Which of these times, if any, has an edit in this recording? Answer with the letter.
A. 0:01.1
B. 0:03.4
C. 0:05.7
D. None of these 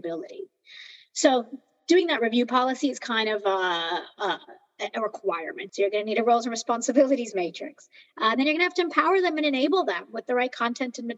C